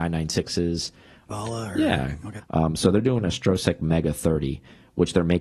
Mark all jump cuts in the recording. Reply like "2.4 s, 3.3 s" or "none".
1.3 s, 2.4 s